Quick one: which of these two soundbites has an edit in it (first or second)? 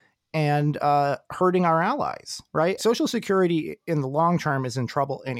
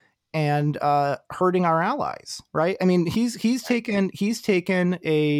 first